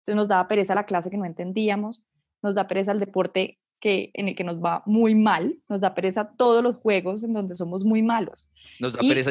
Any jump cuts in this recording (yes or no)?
no